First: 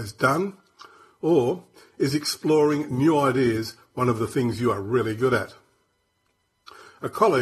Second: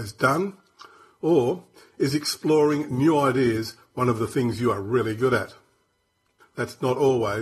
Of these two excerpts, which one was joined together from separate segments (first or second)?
second